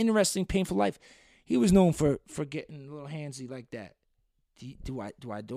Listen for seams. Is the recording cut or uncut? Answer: uncut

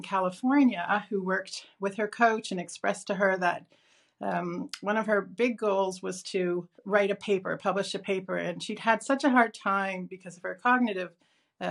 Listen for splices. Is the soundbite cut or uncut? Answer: cut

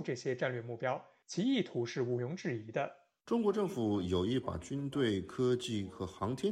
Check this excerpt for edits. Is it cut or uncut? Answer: cut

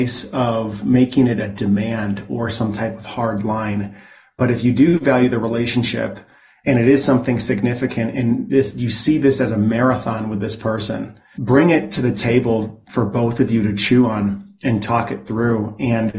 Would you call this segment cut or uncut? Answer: cut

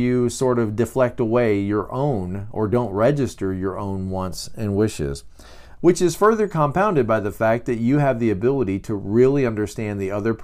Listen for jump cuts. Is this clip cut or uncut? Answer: cut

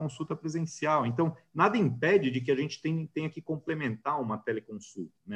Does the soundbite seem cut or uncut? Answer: uncut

